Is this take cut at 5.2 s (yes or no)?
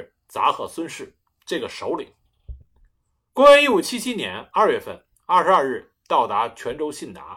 yes